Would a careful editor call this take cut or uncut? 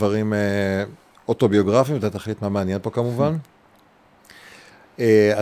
uncut